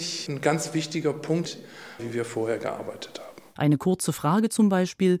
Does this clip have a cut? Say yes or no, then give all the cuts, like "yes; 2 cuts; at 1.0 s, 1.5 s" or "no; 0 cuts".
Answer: yes; 2 cuts; at 2.0 s, 3.6 s